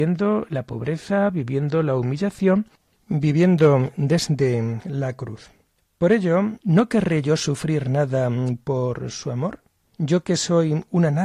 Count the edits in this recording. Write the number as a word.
one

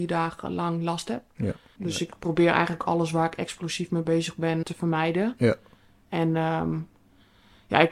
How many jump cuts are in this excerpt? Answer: two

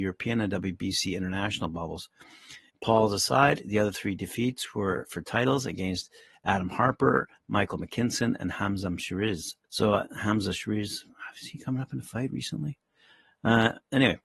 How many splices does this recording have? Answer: two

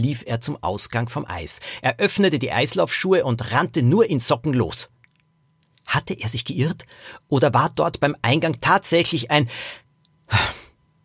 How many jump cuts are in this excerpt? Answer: zero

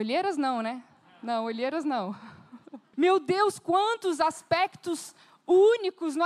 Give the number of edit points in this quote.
one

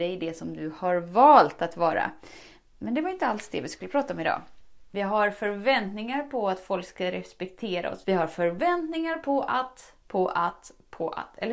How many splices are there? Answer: three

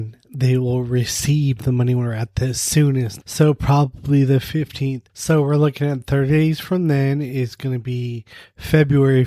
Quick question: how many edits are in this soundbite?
two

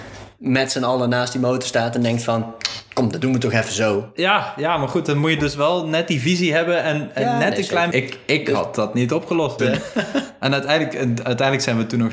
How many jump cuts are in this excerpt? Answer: two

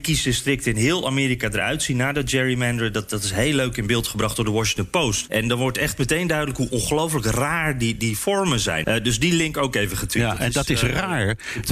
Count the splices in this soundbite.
two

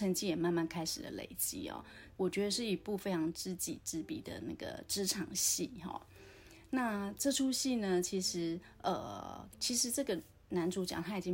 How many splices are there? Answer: two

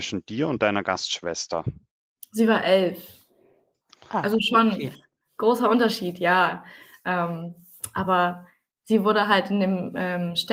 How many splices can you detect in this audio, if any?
zero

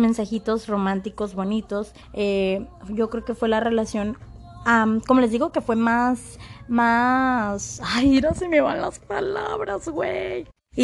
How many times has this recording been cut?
one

